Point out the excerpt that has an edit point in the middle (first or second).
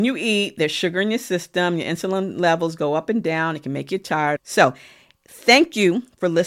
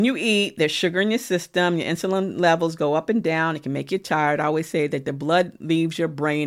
first